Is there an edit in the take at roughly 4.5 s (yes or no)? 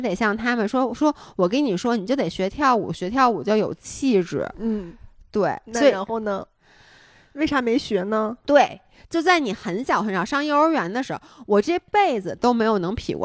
no